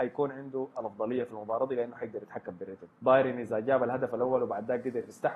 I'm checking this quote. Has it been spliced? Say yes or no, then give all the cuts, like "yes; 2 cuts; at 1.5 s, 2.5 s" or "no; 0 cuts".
yes; 1 cut; at 2.9 s